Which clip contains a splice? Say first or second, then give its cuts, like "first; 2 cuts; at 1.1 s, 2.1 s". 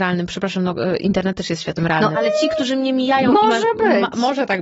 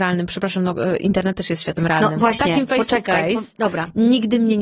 first; 1 cut; at 2.1 s